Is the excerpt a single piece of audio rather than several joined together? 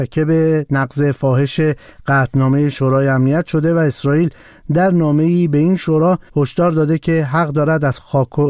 no; 1 cut; at 6.3 s

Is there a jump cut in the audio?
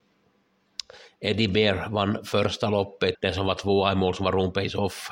yes; 1 cut; at 3.1 s

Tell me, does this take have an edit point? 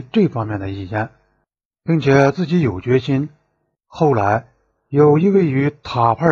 yes; 1 cut; at 3.7 s

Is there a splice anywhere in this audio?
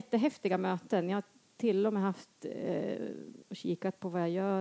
yes; 1 cut; at 3.4 s

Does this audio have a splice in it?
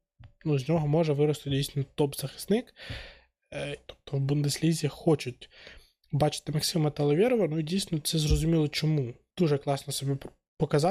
yes; 2 cuts; at 3.9 s, 9.3 s

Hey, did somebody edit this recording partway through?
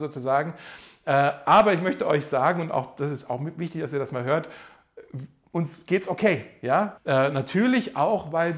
yes; 1 cut; at 7.0 s

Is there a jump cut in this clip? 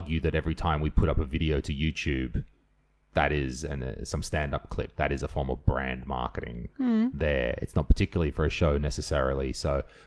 no; 0 cuts

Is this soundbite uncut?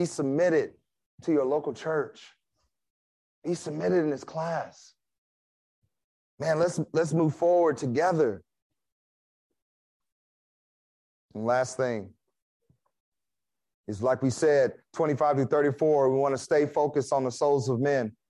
yes; 0 cuts

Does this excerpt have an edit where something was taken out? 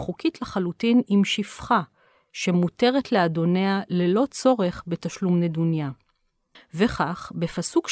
yes; 1 cut; at 6.5 s

